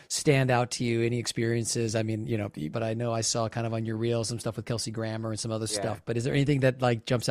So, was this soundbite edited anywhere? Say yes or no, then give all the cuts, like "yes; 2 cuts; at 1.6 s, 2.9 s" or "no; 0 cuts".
yes; 1 cut; at 2.7 s